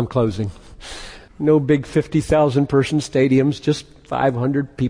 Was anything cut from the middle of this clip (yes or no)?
yes